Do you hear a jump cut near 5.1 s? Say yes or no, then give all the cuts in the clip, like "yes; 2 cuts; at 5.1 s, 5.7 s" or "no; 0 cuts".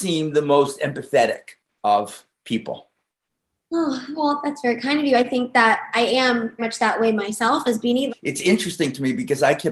no; 2 cuts; at 6.6 s, 8.1 s